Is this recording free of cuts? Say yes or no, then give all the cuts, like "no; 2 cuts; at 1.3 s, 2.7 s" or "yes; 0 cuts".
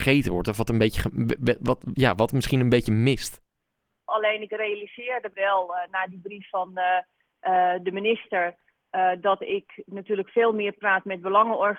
no; 2 cuts; at 4.1 s, 5.3 s